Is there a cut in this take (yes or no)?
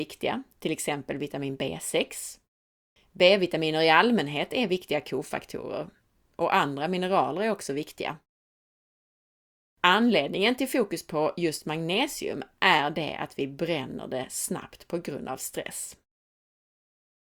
yes